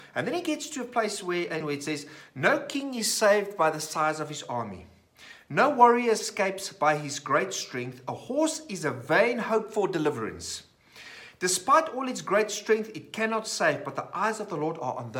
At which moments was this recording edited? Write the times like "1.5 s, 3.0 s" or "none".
1.6 s